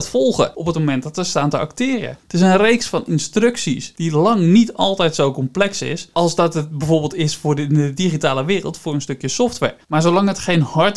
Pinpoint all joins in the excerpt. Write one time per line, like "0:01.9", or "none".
0:09.8